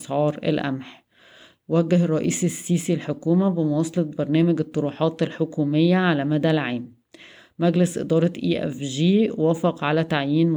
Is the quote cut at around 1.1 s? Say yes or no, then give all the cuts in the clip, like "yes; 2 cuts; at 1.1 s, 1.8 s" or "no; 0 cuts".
no; 0 cuts